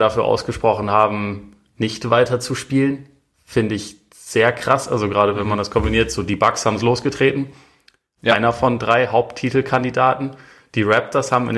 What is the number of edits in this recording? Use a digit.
0